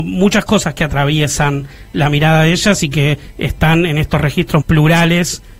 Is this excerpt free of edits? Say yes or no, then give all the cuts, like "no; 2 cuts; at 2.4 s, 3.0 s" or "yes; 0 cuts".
no; 1 cut; at 4.6 s